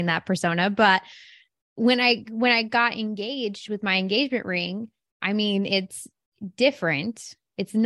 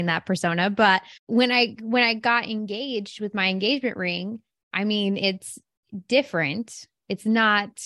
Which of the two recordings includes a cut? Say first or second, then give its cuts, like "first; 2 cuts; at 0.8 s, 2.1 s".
second; 1 cut; at 1.2 s